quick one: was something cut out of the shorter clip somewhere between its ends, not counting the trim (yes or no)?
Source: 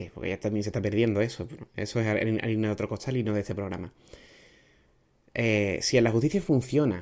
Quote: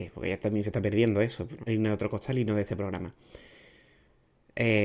yes